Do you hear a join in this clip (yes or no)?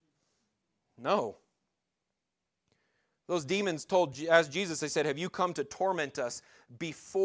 no